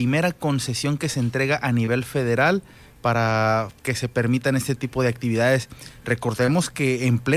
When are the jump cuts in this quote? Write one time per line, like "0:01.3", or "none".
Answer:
none

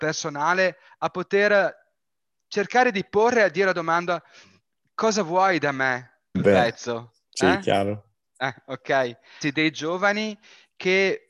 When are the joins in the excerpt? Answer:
0:06.3
0:09.4

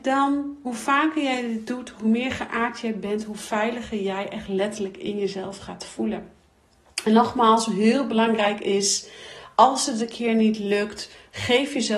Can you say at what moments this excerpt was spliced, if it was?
none

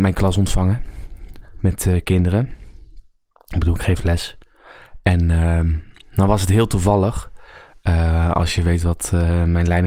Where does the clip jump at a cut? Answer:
none

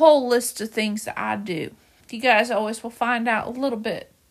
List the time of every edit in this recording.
0:02.0

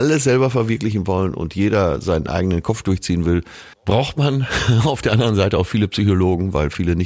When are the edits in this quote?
0:03.7

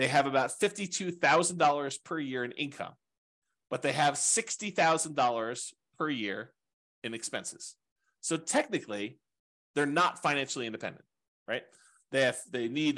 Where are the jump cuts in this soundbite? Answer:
none

